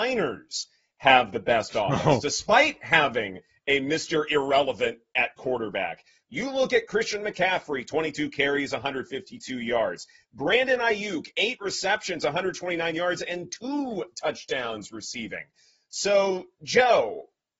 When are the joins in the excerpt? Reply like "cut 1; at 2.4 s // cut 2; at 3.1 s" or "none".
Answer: none